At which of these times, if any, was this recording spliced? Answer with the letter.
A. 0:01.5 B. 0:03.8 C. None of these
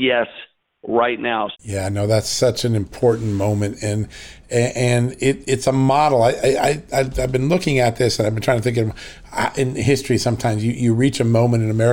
A